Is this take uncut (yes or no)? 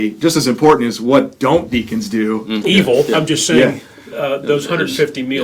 no